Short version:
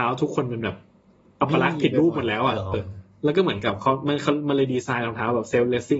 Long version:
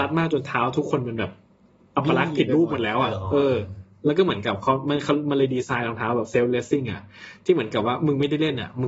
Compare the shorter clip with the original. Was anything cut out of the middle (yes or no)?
yes